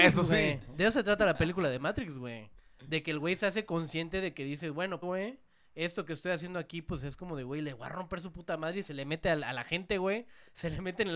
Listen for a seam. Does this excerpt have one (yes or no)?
yes